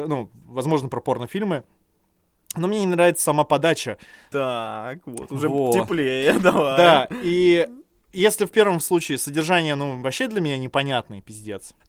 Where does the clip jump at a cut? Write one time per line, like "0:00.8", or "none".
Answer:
0:04.3